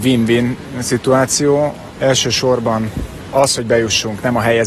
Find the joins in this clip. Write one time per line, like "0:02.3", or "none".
0:01.9